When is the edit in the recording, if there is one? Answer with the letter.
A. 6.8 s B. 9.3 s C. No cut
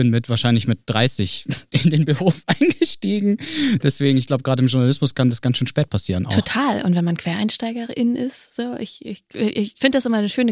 C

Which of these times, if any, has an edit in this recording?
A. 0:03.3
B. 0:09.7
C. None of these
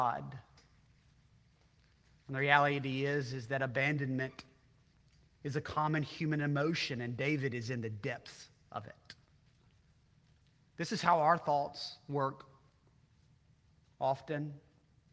C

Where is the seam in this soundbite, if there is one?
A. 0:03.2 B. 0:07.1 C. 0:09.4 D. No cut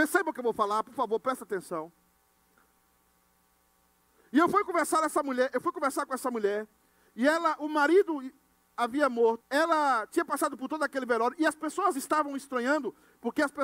C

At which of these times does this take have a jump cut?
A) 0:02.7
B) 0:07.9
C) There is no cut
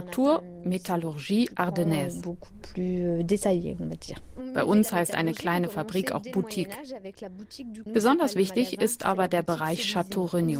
B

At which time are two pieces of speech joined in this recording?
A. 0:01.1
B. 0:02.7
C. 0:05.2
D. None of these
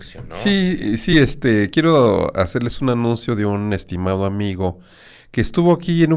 D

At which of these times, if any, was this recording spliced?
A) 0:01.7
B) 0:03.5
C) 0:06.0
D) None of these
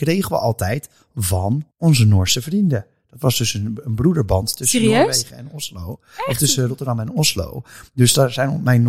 A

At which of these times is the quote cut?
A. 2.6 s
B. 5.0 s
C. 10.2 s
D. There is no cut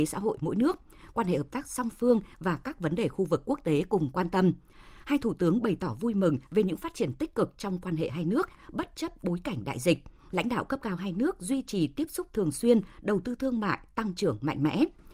C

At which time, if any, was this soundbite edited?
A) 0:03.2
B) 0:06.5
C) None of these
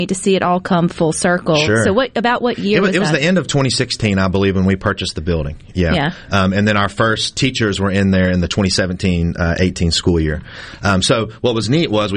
C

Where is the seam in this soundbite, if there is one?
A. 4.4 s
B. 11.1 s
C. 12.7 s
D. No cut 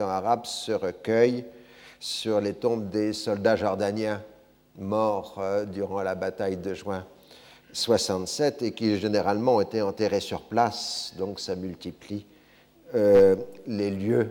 D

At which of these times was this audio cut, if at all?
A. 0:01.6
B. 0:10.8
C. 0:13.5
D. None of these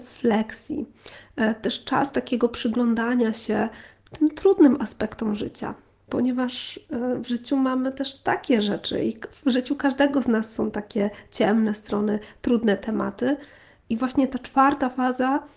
D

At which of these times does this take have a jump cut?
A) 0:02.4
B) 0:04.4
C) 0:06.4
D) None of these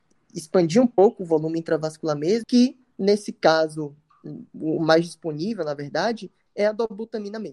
A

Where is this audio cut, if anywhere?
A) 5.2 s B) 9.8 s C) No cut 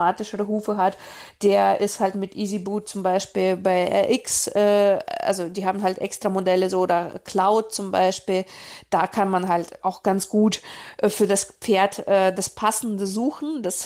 B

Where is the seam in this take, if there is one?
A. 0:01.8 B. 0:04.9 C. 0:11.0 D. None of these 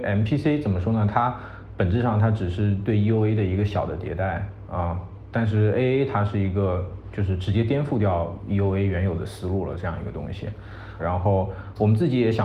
C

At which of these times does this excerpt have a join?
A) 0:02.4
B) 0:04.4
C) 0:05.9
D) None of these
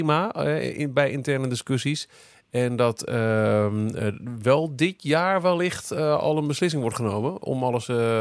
D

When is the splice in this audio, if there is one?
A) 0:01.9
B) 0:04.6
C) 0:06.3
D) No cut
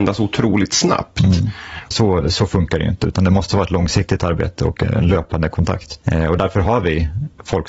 A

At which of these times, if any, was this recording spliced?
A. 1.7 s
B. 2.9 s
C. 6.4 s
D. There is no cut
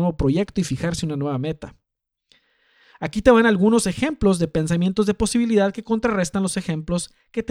B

